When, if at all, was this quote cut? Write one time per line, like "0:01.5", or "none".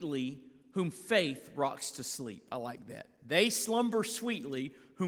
none